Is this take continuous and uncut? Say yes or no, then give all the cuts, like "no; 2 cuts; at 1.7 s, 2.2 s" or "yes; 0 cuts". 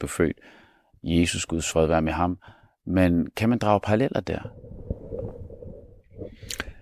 yes; 0 cuts